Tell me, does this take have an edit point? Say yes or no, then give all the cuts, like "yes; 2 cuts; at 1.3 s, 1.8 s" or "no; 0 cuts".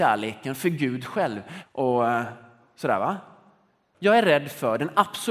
yes; 2 cuts; at 1.6 s, 3.9 s